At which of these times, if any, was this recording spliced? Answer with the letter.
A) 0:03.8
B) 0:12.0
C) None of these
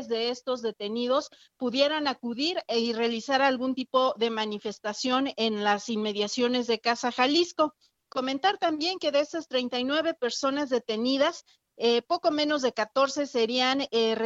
C